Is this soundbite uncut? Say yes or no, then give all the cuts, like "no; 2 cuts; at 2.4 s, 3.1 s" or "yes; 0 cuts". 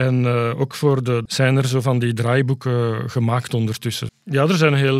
no; 2 cuts; at 1.3 s, 4.1 s